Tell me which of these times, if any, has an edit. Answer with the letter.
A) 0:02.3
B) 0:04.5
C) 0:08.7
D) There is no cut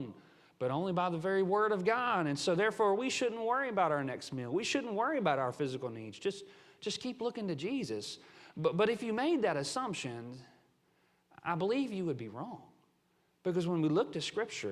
D